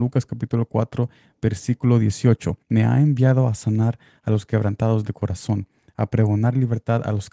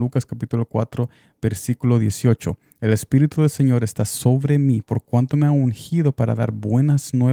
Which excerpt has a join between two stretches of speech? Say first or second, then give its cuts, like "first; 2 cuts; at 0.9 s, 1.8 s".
first; 1 cut; at 2.6 s